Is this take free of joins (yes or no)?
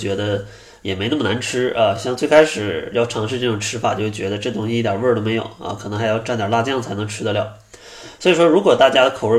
yes